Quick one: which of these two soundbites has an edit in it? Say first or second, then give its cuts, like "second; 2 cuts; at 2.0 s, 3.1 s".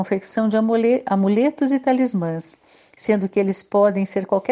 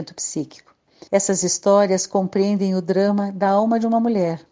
second; 1 cut; at 1.1 s